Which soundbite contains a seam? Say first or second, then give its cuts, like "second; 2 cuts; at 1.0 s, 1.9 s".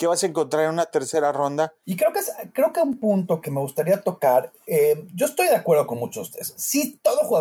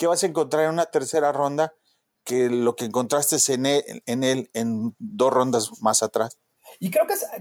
first; 2 cuts; at 1.8 s, 3.4 s